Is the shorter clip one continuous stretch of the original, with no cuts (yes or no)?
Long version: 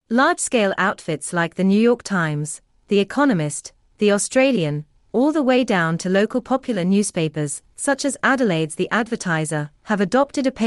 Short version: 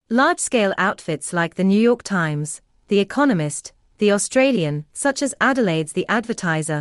no